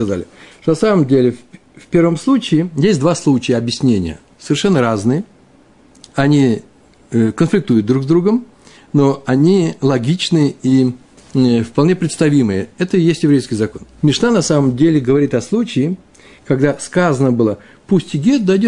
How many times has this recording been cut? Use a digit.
1